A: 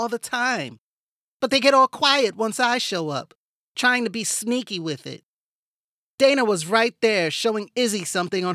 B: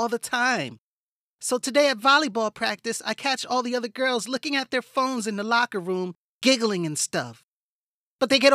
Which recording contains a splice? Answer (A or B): A